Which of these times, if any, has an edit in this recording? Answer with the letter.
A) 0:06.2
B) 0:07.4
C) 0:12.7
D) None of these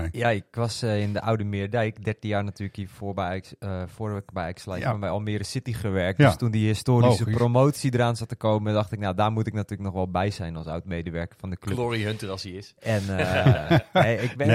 D